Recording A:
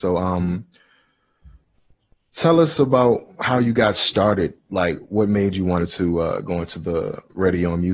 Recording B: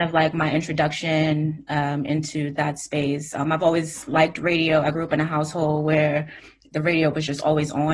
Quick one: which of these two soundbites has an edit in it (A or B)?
A